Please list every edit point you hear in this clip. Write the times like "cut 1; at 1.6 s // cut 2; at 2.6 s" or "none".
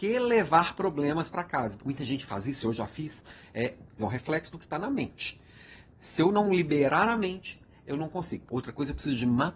cut 1; at 1.8 s // cut 2; at 4.0 s // cut 3; at 8.5 s

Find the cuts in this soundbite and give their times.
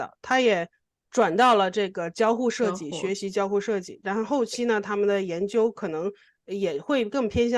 none

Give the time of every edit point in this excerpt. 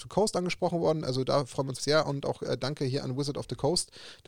cut 1; at 1.8 s

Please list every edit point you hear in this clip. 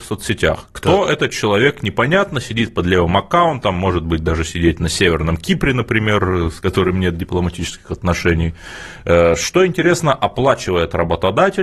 none

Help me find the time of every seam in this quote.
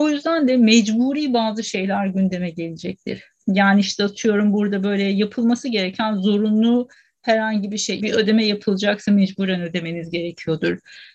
cut 1; at 8.0 s

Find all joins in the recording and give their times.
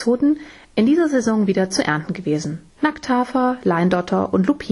cut 1; at 2.7 s

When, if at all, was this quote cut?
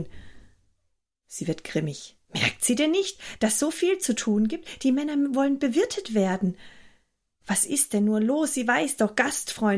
none

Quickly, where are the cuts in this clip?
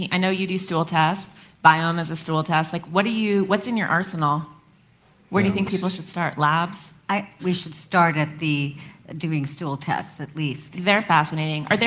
cut 1; at 7.4 s // cut 2; at 10.7 s

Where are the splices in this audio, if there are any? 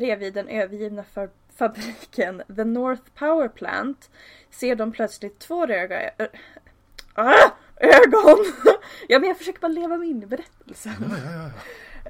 cut 1; at 7.7 s

